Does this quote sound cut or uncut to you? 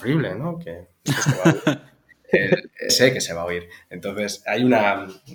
cut